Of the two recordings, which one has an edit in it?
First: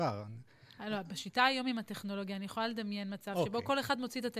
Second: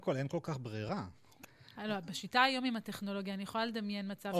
second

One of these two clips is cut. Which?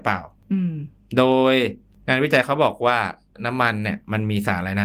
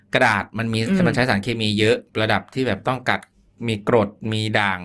second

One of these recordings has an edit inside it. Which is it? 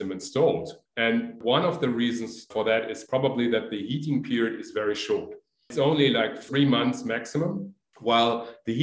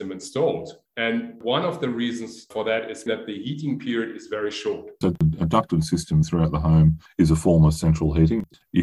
second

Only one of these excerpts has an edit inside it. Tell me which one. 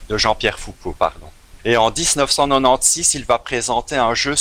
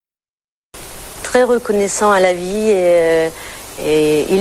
first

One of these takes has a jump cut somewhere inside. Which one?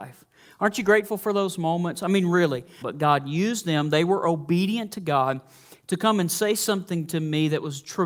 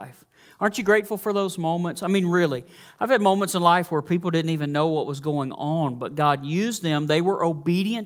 first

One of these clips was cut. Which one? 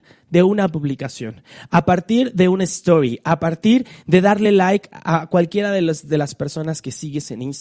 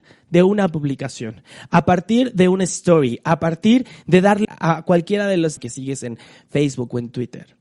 second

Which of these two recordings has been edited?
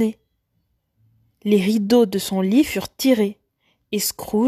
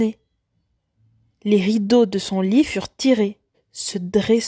second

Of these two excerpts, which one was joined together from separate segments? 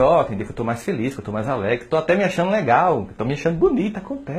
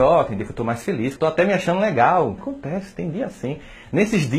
second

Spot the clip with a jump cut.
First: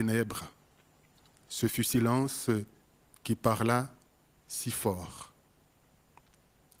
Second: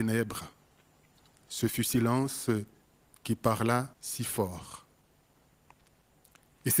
second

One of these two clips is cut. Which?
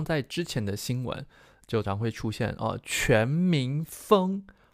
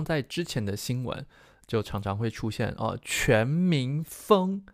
first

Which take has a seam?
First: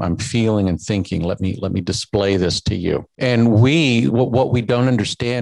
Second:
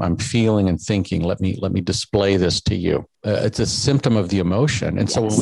second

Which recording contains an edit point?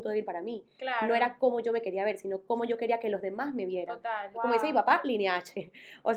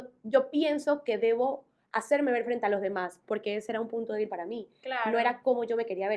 first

